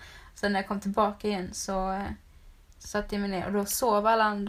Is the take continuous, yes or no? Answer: yes